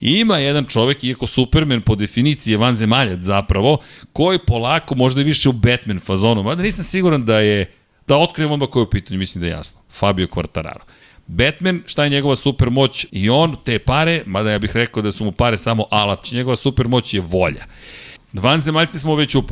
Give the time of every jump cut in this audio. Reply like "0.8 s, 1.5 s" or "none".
13.1 s, 16.2 s, 18.2 s